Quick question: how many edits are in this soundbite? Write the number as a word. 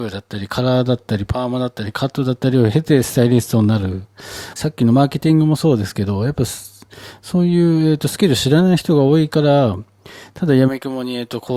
one